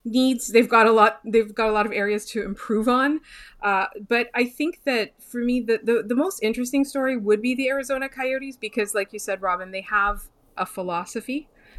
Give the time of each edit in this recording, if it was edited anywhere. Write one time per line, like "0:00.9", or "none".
none

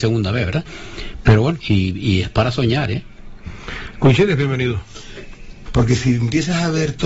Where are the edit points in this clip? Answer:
0:01.6
0:05.7

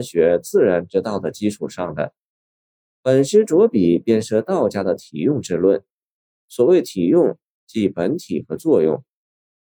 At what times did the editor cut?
none

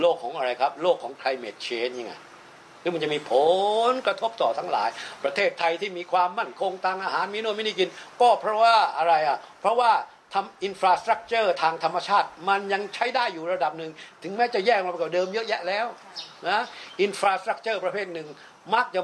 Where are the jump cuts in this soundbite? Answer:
none

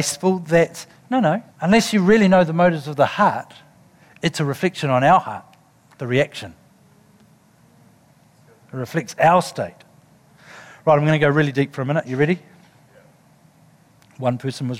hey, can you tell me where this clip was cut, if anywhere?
0:01.5

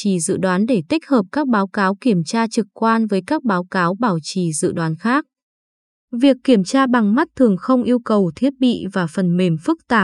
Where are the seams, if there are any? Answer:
none

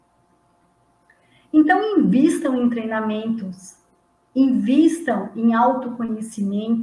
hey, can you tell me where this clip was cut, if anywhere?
none

